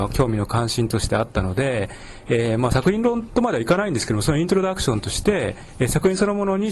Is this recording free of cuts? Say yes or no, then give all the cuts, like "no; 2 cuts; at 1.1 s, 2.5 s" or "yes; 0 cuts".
yes; 0 cuts